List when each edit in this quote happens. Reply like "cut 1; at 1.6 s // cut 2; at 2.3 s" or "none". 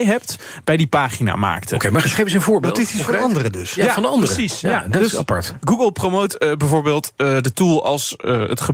none